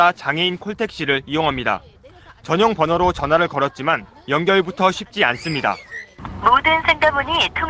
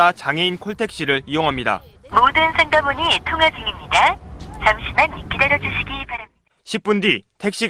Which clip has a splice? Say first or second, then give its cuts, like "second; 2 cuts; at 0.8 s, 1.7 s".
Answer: second; 2 cuts; at 2.1 s, 6.6 s